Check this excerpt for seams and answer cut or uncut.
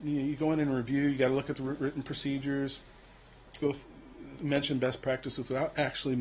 cut